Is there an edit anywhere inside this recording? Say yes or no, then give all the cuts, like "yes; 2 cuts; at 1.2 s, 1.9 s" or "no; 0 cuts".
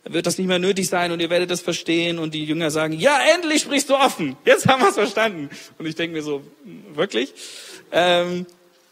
no; 0 cuts